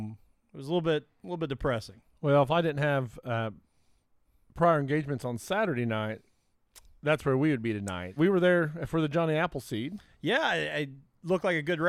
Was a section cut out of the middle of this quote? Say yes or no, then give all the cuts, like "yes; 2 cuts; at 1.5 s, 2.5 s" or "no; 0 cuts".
yes; 1 cut; at 8.2 s